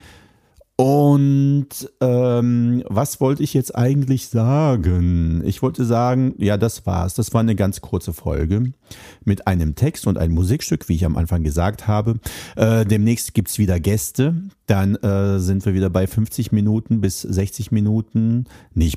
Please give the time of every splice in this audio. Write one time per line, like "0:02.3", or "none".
none